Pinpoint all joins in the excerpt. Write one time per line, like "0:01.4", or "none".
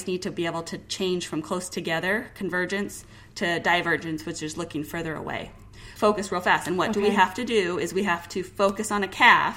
0:06.0

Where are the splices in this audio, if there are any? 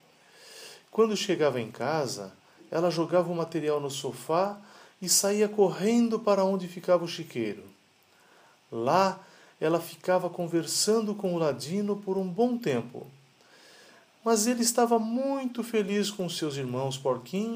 none

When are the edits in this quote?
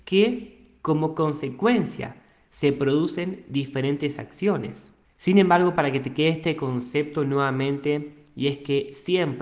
0:05.1

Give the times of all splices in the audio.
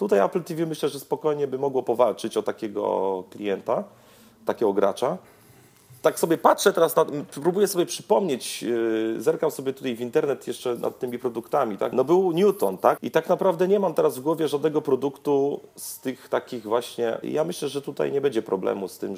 0:11.9
0:13.0
0:17.2

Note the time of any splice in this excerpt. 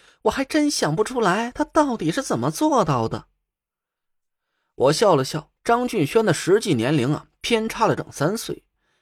0:05.6
0:08.0

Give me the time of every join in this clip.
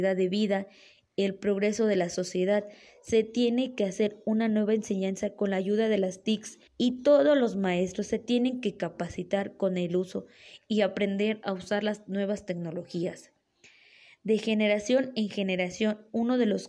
0:06.7

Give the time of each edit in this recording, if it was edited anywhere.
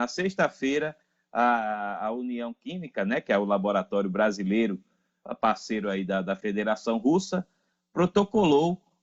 none

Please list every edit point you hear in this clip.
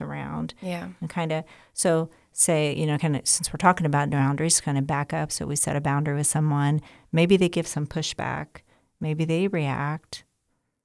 none

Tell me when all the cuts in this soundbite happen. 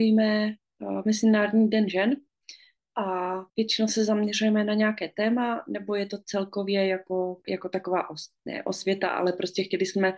0:03.5
0:07.4

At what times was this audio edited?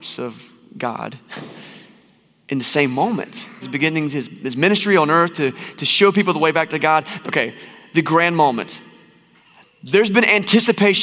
0:03.6
0:07.2

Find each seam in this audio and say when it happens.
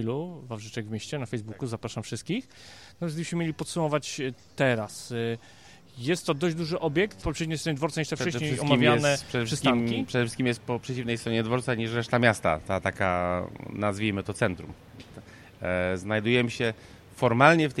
0:07.2

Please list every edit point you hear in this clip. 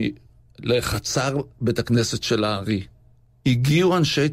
none

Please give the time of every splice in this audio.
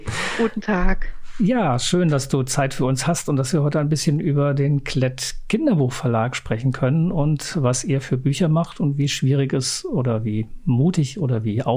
none

